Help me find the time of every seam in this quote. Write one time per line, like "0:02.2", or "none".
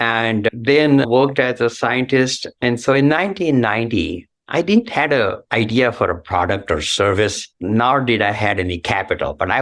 0:02.5
0:05.4
0:07.5